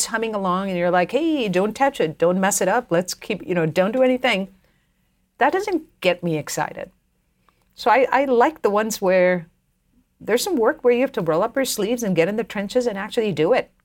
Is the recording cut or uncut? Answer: uncut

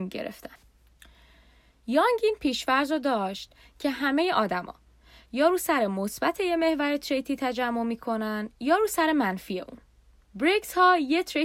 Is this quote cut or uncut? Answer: cut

